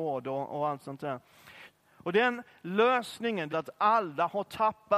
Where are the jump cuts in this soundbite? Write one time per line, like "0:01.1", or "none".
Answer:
0:01.7
0:03.5